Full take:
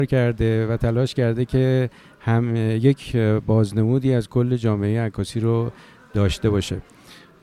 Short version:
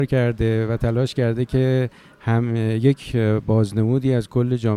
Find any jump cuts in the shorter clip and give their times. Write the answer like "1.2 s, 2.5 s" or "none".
none